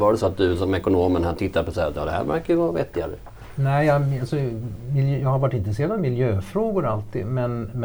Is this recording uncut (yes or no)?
yes